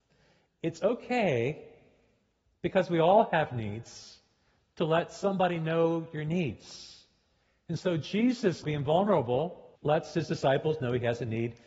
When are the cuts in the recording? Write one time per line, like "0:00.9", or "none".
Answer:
0:08.6
0:09.8